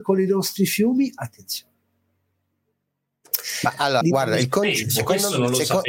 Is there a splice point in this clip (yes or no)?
yes